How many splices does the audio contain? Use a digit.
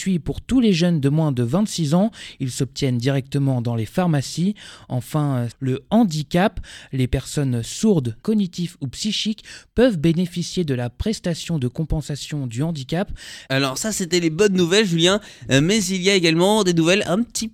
3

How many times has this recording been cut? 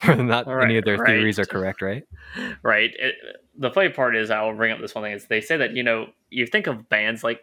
0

